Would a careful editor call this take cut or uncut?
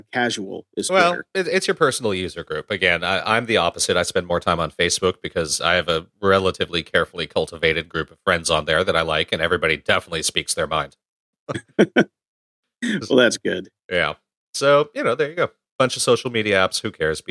uncut